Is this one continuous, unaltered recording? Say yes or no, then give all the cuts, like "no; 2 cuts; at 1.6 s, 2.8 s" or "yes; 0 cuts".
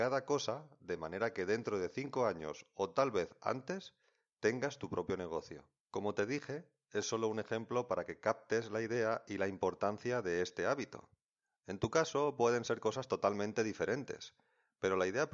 yes; 0 cuts